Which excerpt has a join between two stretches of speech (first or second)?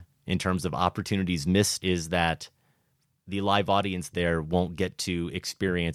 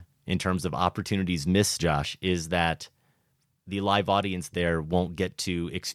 first